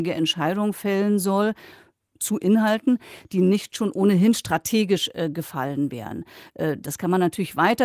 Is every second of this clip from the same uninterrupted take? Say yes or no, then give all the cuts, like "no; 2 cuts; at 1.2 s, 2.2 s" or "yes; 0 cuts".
yes; 0 cuts